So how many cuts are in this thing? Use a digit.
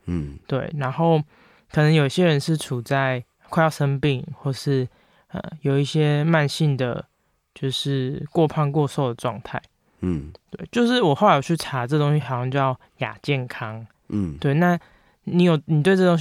0